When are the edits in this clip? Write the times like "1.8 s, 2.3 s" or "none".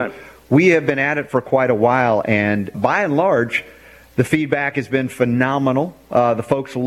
2.7 s